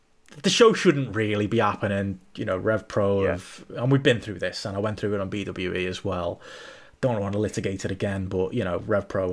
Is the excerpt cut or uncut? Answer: uncut